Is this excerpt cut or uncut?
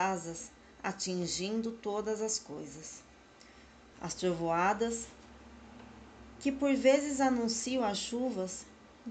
cut